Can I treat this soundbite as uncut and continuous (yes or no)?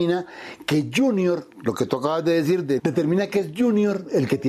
no